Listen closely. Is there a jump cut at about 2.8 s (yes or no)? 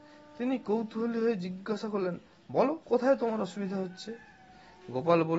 yes